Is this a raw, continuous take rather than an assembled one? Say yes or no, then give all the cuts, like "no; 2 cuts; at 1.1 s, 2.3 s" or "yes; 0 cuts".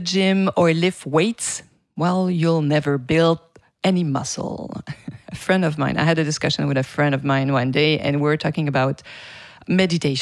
yes; 0 cuts